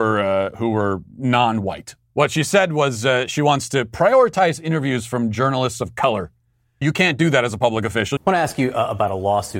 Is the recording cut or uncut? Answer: cut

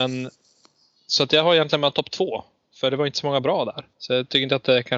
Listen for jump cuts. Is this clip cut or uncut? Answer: cut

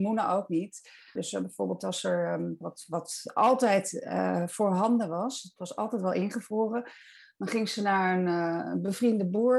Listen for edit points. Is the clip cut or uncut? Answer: cut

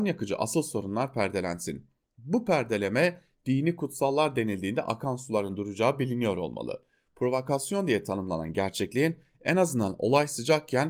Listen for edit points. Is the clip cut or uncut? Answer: uncut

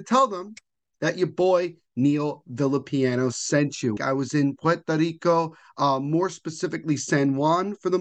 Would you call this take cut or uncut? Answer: cut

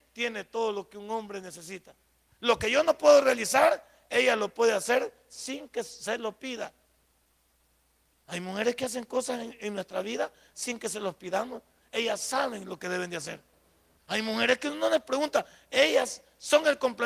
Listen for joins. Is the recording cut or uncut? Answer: cut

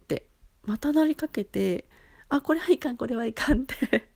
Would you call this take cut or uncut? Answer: uncut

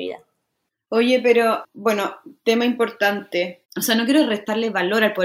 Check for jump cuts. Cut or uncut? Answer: cut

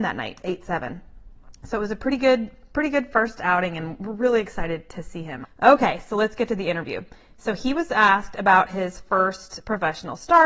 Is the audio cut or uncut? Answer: cut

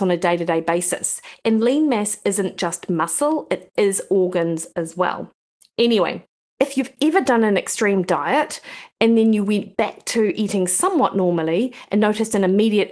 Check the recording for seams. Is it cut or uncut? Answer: uncut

